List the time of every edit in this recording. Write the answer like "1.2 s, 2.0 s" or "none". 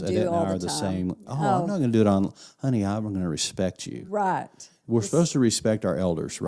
none